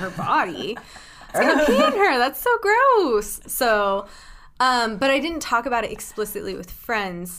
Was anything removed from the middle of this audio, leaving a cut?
yes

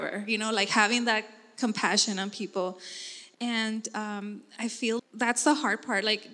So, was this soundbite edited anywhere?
yes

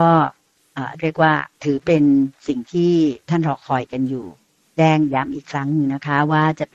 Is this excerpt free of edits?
no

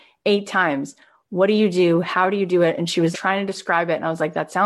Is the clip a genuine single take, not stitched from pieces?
no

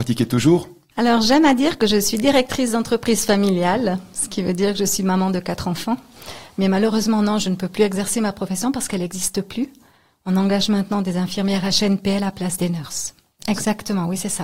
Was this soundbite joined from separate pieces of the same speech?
yes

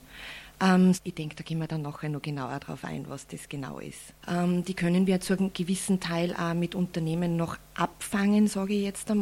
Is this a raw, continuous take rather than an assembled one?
no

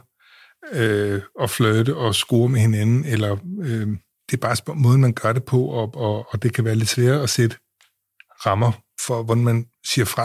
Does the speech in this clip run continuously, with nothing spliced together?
no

